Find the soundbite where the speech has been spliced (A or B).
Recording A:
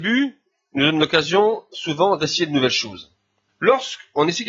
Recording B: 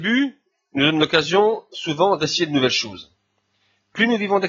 A